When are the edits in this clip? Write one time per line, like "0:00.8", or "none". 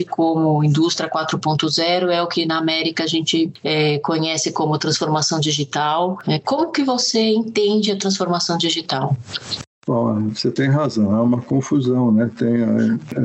none

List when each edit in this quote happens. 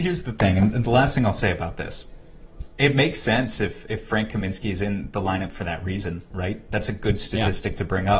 0:02.7

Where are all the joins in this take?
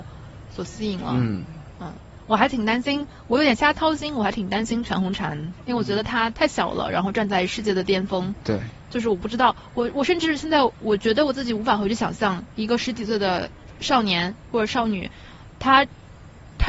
0:06.3

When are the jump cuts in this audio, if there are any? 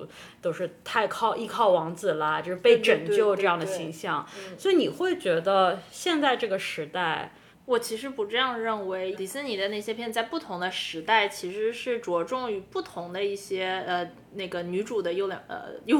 0:07.5
0:09.1

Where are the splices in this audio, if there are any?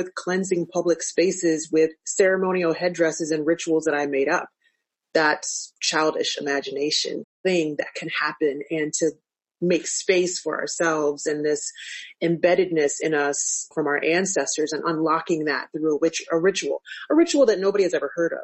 0:07.2
0:13.7

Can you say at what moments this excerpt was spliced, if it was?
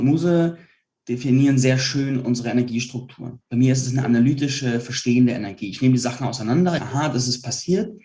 0:06.8

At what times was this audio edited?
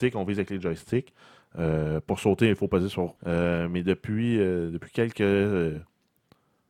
0:03.2

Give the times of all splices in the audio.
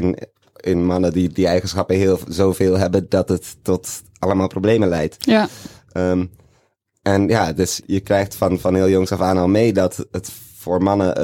0:07.8
0:10.1

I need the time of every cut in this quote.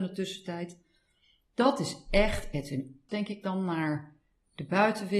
0:03.1

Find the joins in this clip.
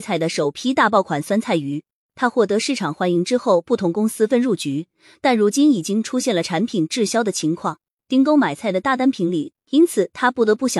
0:04.3
0:09.5

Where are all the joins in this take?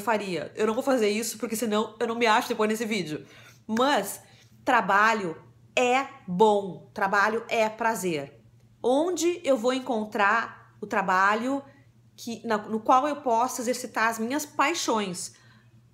0:08.7

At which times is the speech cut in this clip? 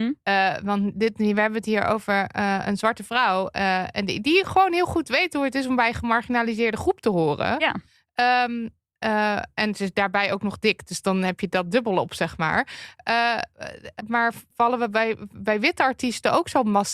0:14.0

